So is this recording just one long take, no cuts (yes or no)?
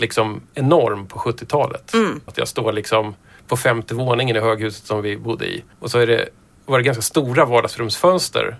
no